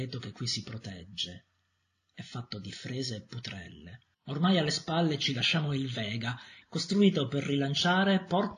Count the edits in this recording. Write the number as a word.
two